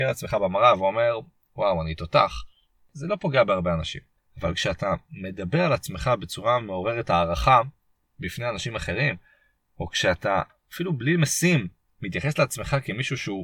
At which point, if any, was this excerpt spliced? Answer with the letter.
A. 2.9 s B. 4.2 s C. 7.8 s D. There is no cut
B